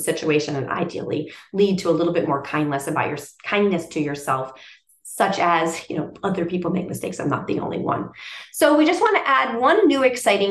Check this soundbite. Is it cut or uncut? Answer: uncut